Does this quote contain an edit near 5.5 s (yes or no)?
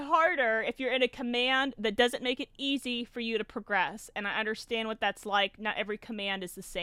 no